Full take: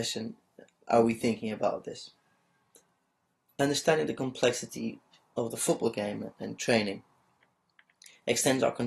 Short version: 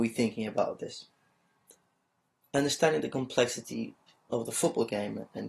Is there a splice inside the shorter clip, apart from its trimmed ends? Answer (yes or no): no